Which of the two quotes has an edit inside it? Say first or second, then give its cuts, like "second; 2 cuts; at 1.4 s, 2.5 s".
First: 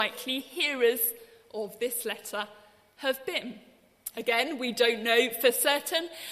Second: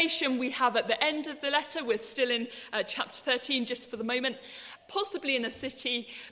second; 1 cut; at 4.8 s